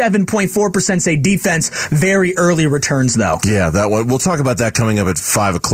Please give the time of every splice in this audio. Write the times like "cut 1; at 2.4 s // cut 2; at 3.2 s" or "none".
none